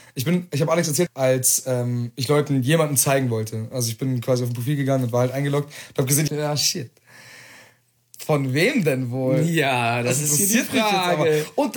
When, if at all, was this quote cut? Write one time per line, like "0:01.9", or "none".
0:01.1
0:06.3